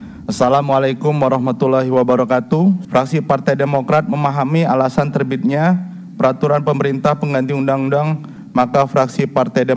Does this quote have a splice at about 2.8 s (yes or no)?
yes